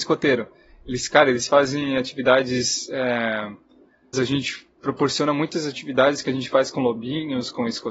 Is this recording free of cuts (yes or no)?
no